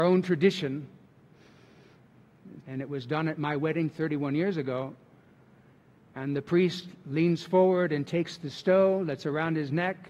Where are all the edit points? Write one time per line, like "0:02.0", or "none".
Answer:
0:02.6